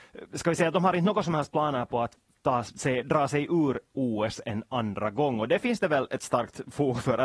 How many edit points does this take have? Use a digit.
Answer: 0